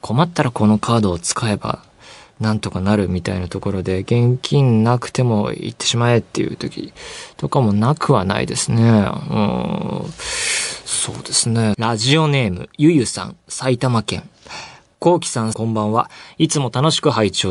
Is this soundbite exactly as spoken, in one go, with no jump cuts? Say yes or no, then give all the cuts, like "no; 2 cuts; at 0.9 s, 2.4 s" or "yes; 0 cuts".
no; 2 cuts; at 11.7 s, 15.5 s